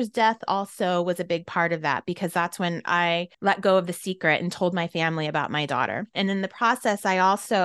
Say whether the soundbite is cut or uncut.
cut